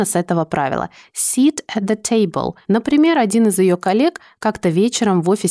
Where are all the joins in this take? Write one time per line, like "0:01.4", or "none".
0:02.6